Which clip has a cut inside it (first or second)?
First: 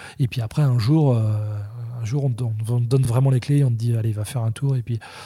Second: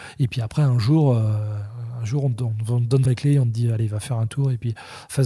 second